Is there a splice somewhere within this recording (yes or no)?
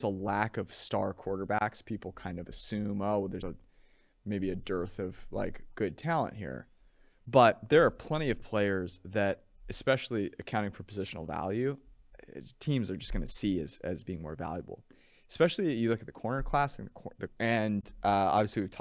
yes